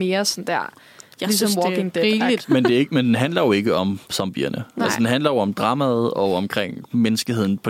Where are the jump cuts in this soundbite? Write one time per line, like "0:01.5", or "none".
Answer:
0:02.4